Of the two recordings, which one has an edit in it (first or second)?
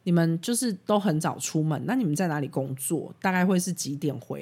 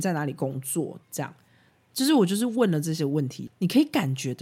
second